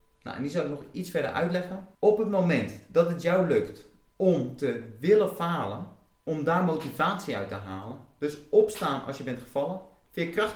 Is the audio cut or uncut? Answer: cut